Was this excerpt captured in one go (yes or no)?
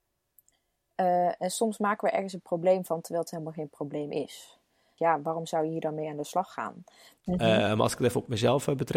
no